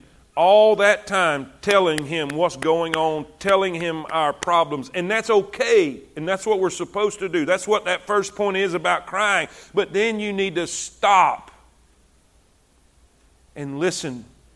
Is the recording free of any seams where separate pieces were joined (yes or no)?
yes